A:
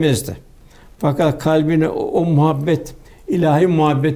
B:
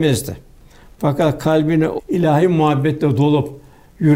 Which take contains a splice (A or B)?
B